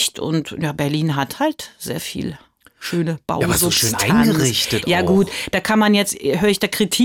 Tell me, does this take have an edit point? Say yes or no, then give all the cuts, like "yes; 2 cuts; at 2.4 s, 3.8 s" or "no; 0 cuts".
no; 0 cuts